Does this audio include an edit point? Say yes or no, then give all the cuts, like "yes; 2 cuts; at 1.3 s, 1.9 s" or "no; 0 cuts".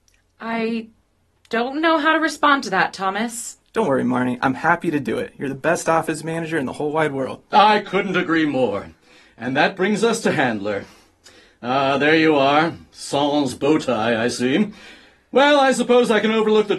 no; 0 cuts